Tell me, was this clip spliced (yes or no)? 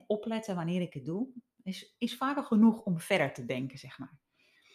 no